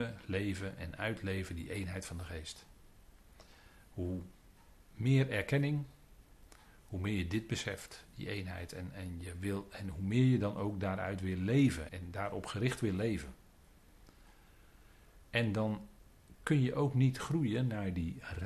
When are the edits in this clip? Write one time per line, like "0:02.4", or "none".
0:11.9
0:15.2